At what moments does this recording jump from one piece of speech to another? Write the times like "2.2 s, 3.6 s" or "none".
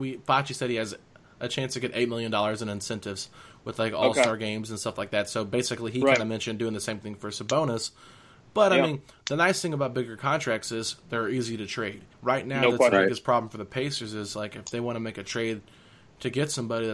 12.1 s